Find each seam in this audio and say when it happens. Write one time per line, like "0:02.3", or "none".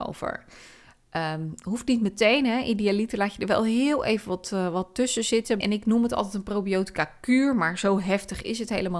0:05.6